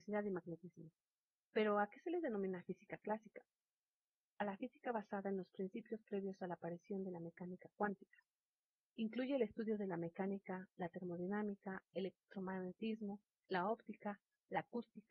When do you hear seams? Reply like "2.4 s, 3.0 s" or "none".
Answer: none